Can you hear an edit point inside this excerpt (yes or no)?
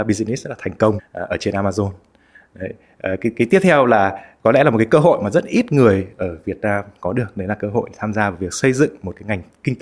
yes